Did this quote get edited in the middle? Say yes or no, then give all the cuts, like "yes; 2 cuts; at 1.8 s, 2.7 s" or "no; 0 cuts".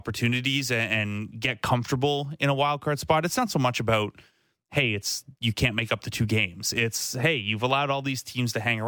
no; 0 cuts